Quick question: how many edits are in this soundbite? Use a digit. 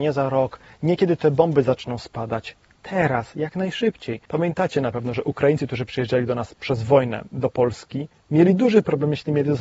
1